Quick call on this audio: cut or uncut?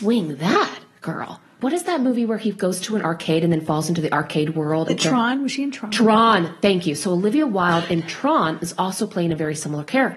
cut